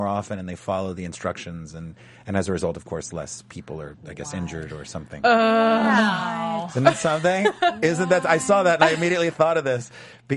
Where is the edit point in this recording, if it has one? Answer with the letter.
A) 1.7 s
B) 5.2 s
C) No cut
C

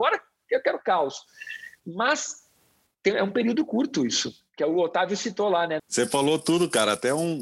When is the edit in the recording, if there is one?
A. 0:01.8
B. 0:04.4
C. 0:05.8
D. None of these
C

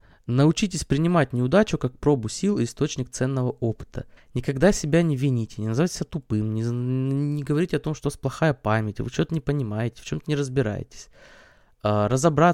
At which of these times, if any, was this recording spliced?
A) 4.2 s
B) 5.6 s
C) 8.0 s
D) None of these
A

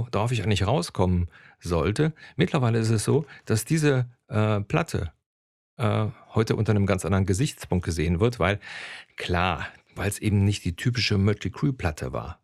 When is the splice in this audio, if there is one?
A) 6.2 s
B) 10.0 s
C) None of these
B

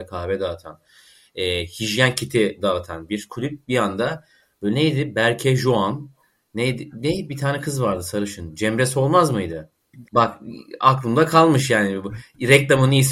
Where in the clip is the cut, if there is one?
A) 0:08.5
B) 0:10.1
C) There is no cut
B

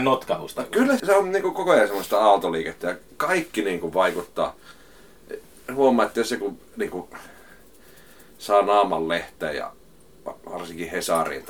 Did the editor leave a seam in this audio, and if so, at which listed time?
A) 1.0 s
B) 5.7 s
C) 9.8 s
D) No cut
A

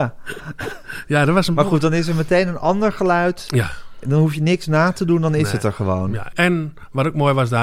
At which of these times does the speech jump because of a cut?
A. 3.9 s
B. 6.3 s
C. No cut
B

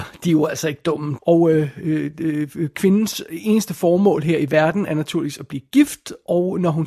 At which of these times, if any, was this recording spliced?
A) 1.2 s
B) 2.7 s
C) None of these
A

